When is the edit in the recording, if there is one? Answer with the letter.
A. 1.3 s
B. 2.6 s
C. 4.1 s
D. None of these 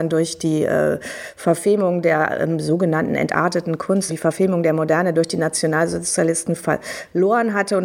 C